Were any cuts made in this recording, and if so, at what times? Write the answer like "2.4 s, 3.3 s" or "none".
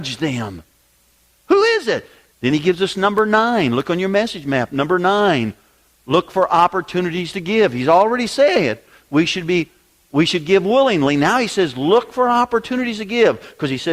2.3 s